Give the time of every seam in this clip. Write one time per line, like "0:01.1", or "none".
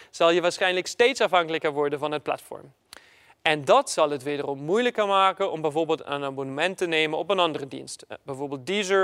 none